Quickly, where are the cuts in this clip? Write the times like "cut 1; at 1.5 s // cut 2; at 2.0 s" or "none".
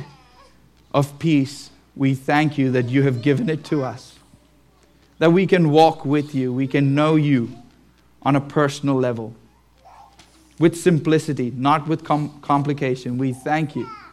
none